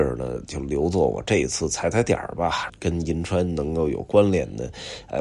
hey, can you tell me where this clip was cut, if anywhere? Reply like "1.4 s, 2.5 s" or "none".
2.7 s